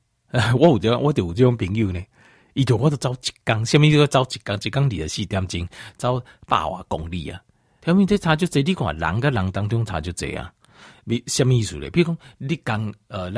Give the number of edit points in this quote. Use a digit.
1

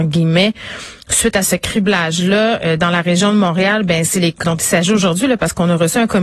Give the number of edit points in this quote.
1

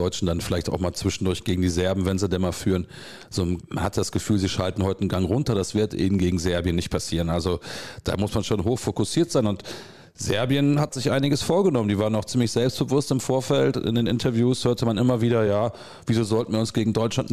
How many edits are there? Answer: 0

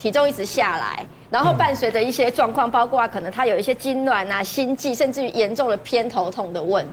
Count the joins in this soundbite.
0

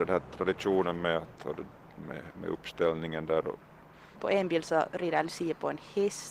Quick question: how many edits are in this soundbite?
1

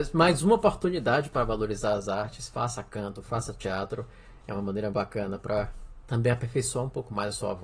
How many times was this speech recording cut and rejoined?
1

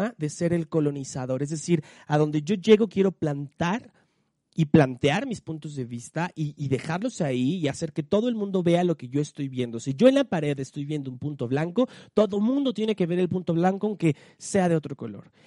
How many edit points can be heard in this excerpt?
0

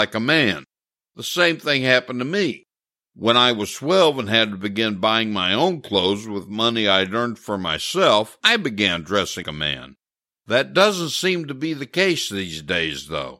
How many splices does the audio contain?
1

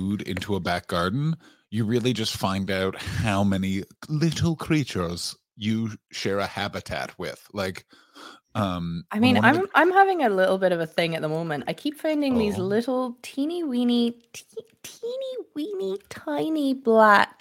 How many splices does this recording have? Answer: 0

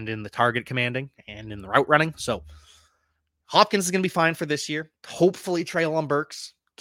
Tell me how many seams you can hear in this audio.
1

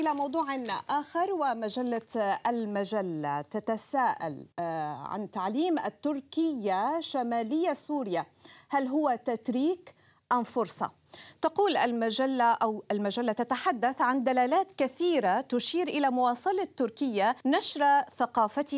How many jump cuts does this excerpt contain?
2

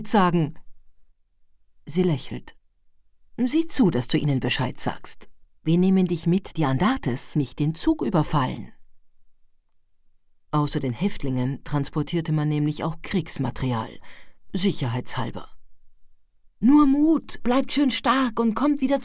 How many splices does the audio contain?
2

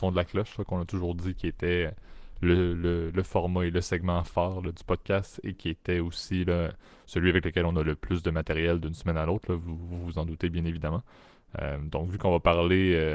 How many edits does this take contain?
0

